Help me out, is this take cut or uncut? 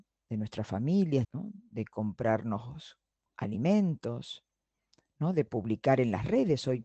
cut